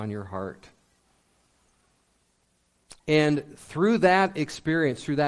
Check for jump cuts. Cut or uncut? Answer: cut